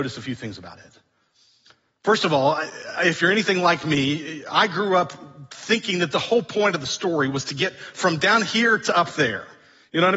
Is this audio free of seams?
yes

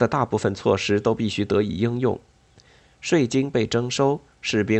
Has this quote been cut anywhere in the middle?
no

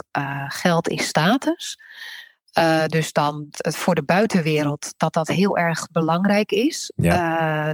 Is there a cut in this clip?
yes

